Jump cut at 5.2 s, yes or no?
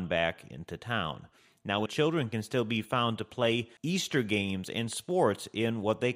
no